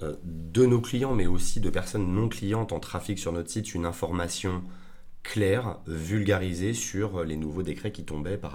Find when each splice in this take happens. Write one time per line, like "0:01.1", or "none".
none